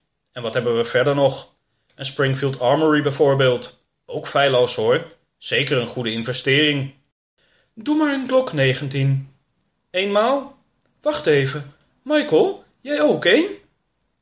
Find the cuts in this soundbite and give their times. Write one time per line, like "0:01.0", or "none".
none